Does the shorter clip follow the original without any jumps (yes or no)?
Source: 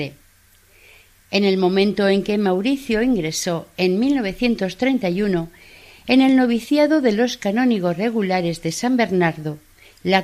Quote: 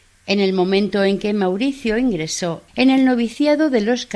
no